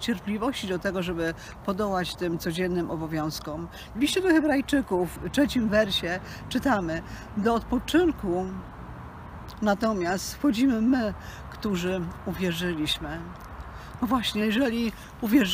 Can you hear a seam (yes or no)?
yes